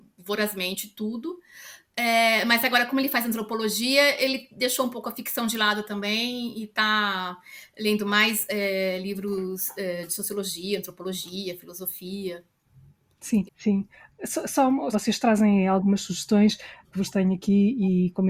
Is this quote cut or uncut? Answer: cut